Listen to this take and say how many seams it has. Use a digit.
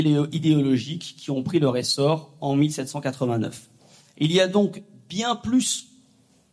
0